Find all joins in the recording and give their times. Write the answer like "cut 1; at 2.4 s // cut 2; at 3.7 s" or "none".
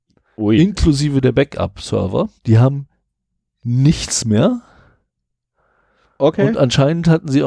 cut 1; at 2.4 s